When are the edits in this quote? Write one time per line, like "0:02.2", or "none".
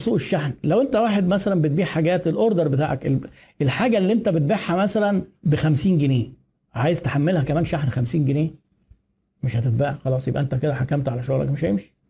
0:05.3